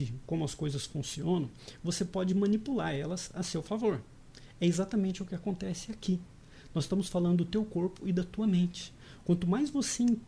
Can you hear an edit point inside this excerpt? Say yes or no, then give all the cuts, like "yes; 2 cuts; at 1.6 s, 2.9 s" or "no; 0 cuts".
no; 0 cuts